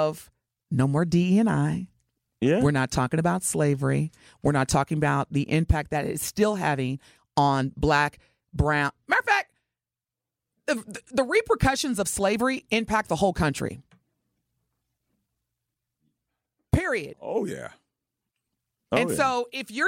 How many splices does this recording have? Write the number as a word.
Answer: zero